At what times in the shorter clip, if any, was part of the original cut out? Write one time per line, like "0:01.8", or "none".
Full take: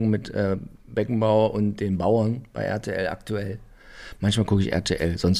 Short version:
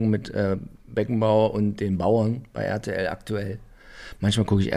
none